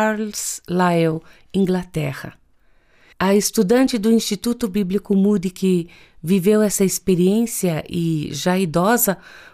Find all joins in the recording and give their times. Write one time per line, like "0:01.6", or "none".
0:03.1